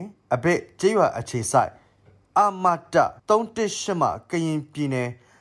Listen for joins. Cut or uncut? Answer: cut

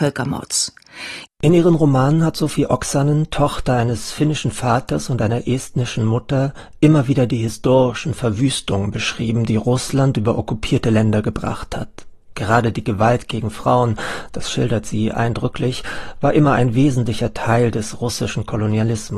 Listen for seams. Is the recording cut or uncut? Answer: cut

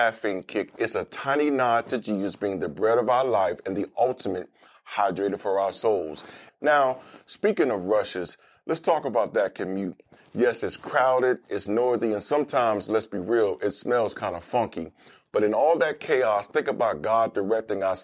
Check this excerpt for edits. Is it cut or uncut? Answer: cut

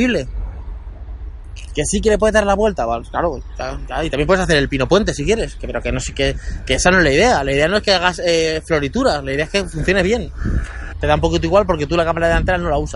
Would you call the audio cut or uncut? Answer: cut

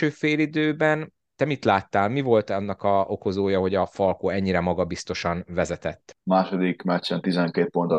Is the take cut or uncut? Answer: cut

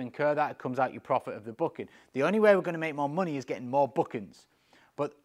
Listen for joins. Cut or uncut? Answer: uncut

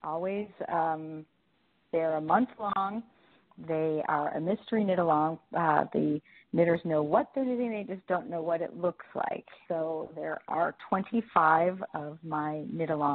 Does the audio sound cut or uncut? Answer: cut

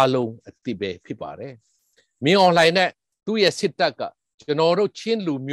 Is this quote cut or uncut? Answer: uncut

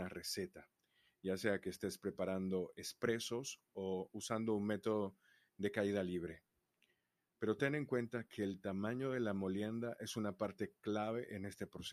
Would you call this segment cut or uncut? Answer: uncut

